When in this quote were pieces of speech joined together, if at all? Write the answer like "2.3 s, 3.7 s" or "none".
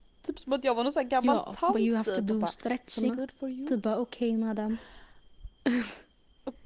3.1 s